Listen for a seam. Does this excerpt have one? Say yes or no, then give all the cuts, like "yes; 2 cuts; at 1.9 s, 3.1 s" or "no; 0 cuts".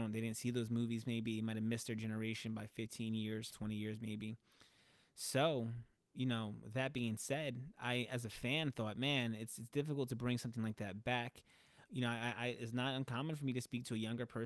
yes; 2 cuts; at 3.5 s, 11.9 s